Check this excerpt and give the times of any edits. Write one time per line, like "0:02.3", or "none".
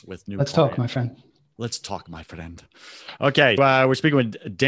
0:03.6